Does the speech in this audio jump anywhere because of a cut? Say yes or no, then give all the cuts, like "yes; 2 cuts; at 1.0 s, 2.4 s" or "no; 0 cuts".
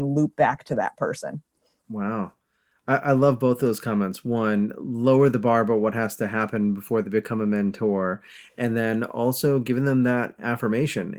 no; 0 cuts